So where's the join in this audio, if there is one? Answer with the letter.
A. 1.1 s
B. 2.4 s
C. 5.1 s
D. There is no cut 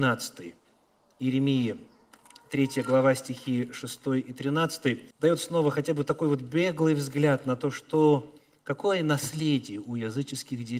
C